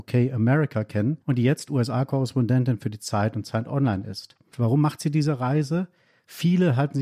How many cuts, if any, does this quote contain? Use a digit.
2